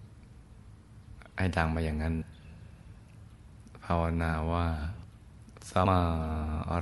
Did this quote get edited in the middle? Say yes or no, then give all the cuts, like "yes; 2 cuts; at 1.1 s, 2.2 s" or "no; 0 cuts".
yes; 1 cut; at 5.9 s